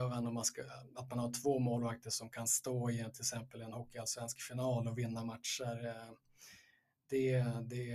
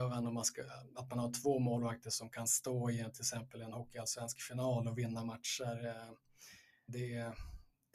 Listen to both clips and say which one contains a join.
second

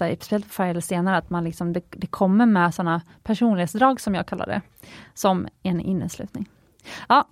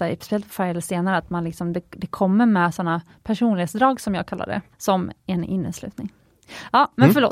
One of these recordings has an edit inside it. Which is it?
second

